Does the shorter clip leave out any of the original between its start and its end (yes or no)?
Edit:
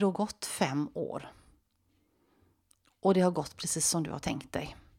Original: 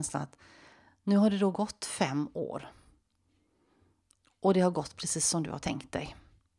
no